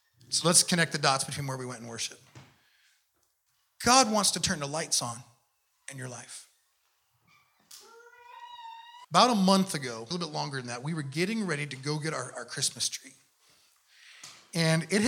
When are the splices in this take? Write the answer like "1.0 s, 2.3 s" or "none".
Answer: 9.0 s, 10.1 s